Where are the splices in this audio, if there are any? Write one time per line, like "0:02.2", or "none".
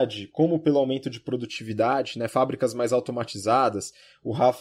none